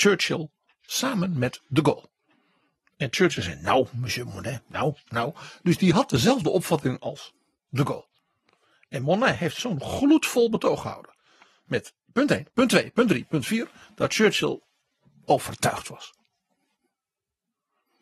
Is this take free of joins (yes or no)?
yes